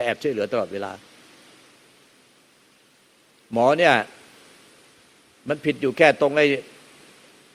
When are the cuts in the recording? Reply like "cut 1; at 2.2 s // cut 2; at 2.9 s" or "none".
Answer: none